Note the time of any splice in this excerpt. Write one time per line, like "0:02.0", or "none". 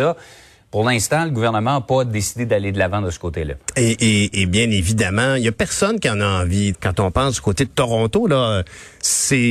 0:06.7